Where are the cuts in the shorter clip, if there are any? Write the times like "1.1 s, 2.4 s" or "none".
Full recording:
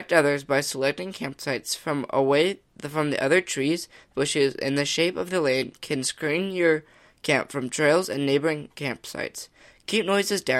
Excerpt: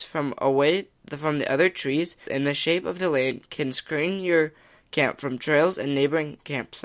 2.3 s